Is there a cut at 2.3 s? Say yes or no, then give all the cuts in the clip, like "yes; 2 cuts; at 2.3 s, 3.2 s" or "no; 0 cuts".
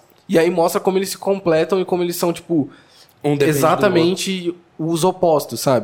no; 0 cuts